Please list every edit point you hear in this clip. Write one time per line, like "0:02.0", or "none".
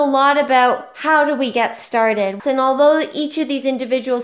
0:02.4